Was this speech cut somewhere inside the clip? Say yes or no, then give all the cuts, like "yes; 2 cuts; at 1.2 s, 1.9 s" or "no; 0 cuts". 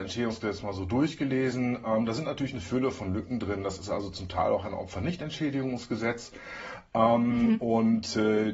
no; 0 cuts